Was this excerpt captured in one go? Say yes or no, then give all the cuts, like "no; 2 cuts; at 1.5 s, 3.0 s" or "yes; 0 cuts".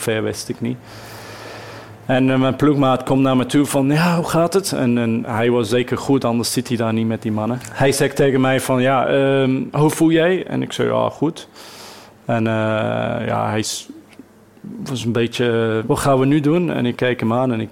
no; 1 cut; at 15.8 s